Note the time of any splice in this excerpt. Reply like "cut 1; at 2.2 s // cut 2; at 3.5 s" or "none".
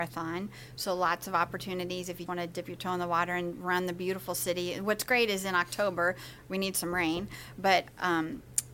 cut 1; at 2.3 s